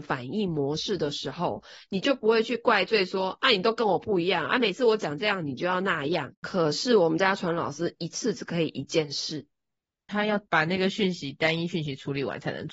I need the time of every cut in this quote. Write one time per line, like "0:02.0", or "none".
0:06.3